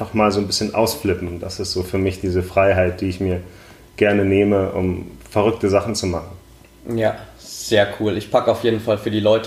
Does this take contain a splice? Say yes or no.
no